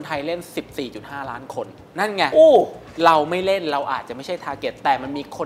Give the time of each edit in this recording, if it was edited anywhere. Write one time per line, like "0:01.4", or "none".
none

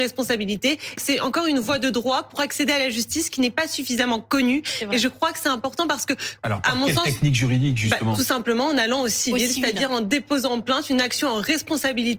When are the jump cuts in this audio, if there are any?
0:01.0

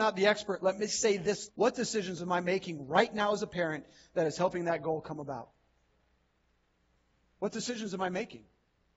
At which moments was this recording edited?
0:01.5

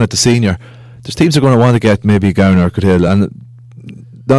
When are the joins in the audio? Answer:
none

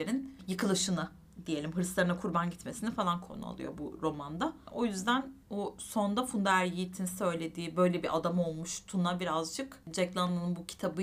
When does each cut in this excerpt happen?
0:05.4

